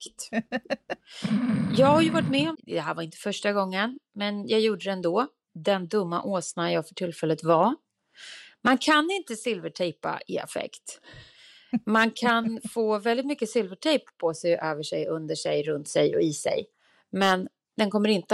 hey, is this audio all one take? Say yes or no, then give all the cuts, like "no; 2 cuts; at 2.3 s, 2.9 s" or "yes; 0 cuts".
no; 1 cut; at 2.5 s